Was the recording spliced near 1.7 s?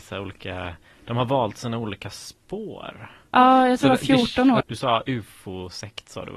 no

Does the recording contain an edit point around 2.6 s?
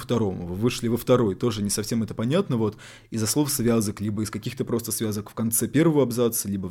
no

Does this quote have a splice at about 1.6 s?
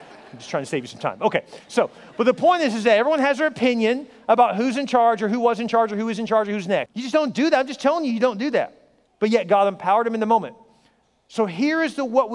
no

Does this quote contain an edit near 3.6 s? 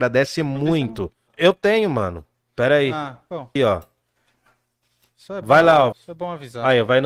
yes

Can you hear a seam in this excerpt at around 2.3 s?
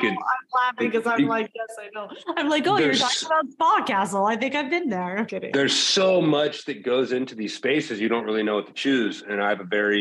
no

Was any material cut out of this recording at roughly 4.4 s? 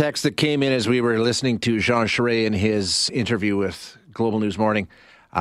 no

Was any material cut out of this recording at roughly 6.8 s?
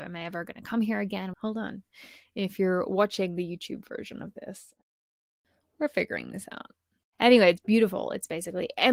no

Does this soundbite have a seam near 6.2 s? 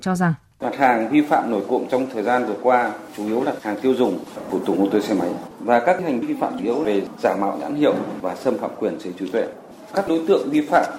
yes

